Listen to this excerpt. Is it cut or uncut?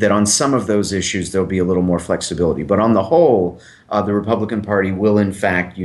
uncut